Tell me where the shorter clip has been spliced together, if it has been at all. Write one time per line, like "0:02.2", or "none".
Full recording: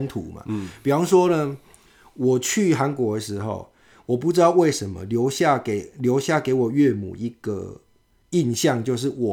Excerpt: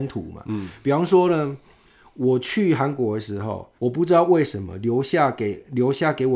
0:03.8